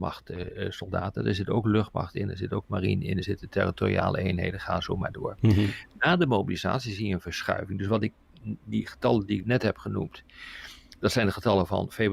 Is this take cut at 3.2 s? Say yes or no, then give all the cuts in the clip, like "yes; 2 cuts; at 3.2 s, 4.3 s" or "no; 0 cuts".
no; 0 cuts